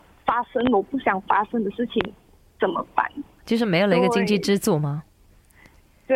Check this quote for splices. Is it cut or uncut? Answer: cut